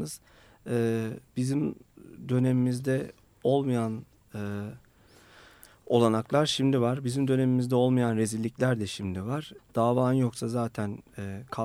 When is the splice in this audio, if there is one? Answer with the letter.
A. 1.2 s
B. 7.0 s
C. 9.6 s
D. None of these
C